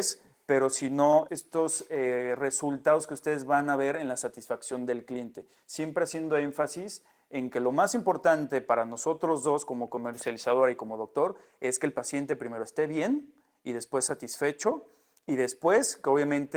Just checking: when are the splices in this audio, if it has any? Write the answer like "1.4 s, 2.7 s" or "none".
1.3 s